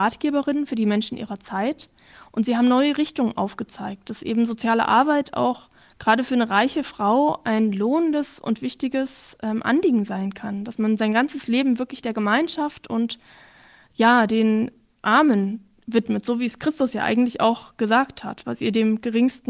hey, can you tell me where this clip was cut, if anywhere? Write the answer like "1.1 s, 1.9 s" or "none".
none